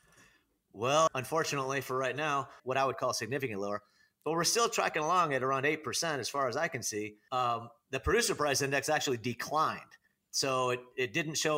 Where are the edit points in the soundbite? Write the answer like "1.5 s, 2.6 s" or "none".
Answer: 1.1 s, 2.6 s, 7.3 s